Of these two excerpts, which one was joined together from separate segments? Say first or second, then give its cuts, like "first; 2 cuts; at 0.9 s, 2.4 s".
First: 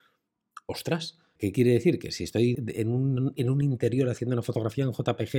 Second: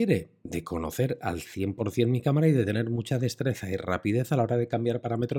first; 2 cuts; at 1.4 s, 2.5 s